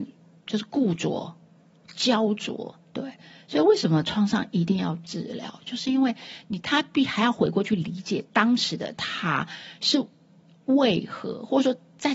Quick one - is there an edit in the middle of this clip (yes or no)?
yes